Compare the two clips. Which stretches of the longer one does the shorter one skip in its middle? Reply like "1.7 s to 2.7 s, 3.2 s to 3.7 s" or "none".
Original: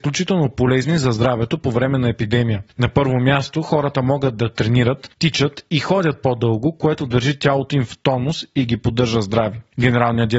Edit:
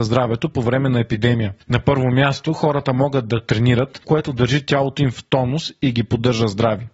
5.1 s to 6.8 s